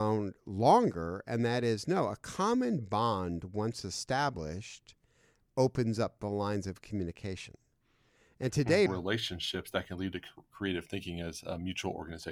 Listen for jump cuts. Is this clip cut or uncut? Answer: cut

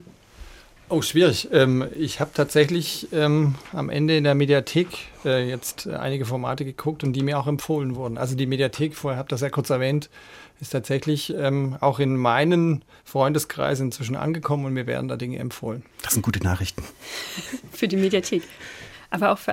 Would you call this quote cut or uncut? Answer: cut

